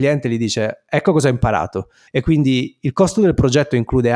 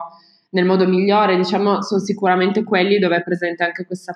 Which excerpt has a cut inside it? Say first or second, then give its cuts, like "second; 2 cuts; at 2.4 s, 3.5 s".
first; 1 cut; at 2.1 s